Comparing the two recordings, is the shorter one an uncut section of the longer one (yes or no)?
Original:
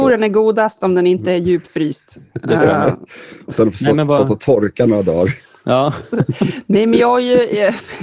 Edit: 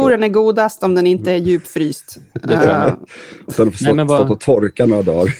yes